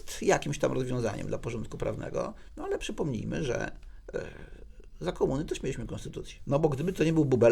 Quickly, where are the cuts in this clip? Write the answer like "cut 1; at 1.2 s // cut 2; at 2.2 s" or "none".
cut 1; at 6.4 s